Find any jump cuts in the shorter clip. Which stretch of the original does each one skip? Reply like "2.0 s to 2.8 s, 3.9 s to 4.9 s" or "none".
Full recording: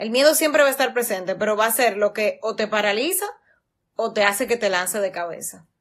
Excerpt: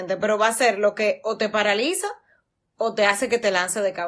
none